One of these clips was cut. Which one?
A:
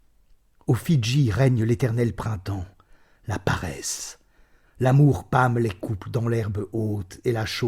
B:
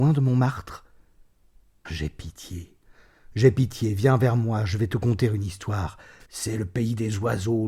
B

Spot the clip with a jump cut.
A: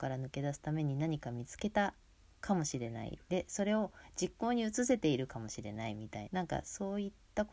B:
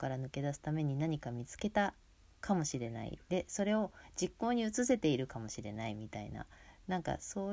A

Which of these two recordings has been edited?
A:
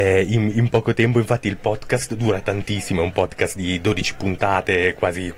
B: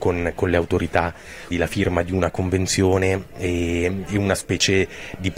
B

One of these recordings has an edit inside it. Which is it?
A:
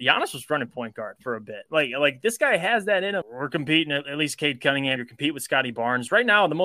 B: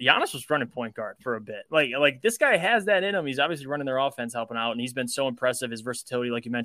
A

